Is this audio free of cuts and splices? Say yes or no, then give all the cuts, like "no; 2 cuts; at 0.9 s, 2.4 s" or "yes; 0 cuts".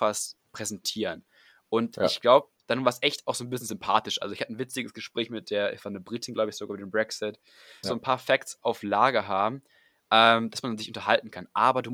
no; 1 cut; at 7.8 s